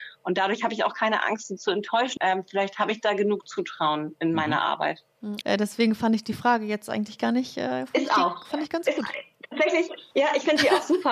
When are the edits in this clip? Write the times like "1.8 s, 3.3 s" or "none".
2.2 s, 5.4 s